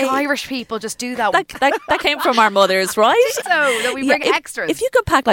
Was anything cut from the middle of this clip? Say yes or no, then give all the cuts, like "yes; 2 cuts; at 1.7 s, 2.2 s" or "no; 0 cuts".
yes; 2 cuts; at 1.3 s, 3.4 s